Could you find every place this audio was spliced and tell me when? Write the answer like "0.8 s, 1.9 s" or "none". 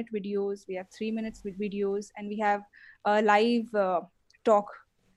none